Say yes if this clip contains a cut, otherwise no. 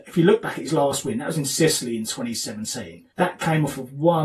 yes